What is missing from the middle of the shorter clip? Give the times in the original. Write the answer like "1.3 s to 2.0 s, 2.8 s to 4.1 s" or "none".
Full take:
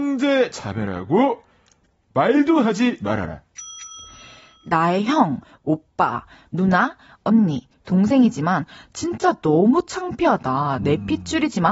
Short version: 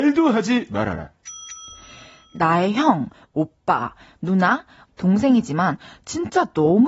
7.2 s to 7.8 s